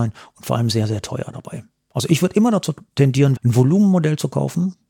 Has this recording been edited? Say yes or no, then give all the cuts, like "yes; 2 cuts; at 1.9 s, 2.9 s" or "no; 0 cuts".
yes; 1 cut; at 3.4 s